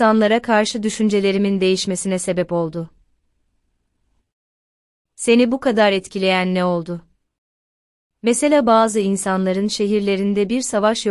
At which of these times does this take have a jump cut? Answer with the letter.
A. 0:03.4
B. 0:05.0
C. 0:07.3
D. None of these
D